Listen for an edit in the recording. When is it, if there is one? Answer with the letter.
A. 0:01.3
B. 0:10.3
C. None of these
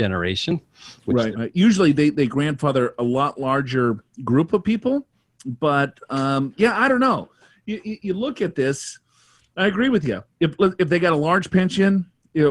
A